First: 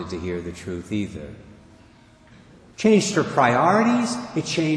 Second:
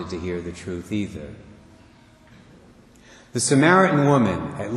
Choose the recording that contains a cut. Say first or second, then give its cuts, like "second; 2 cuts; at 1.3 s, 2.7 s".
first; 1 cut; at 2.7 s